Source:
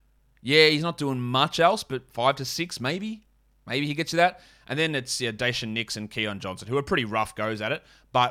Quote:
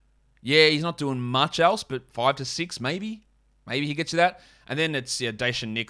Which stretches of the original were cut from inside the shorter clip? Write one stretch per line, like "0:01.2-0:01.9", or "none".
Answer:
none